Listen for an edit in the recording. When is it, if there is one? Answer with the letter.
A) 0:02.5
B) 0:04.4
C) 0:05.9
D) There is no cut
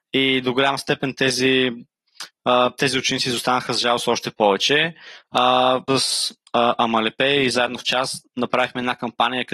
C